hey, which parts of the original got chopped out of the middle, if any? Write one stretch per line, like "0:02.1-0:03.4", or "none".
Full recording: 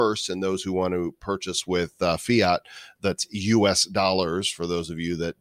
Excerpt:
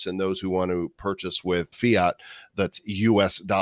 0:02.0-0:02.2